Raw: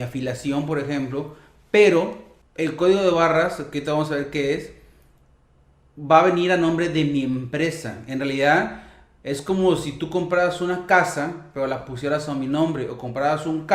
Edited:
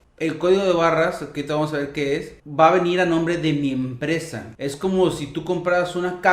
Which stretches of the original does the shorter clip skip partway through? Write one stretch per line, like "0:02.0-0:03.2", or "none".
0:04.8-0:05.9
0:08.1-0:09.2